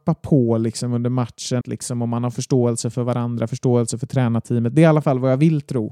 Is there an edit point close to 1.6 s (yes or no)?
yes